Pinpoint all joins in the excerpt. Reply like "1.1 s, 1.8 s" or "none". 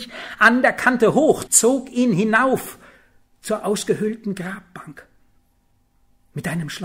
1.5 s